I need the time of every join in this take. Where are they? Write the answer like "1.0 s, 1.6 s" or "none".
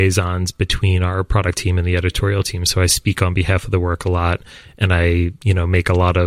5.4 s